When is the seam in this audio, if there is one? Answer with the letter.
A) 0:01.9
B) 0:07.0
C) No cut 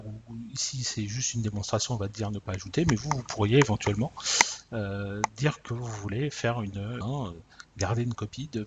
B